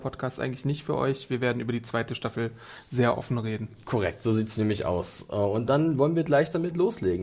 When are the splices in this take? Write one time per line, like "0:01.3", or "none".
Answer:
none